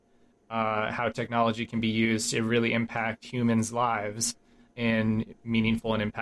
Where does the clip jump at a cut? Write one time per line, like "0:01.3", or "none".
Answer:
0:04.7